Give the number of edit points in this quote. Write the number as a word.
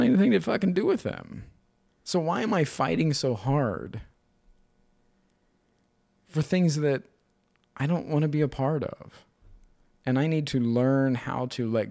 one